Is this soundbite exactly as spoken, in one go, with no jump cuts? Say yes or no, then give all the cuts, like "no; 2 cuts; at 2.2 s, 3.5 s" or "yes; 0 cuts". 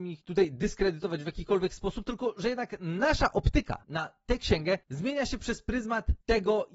yes; 0 cuts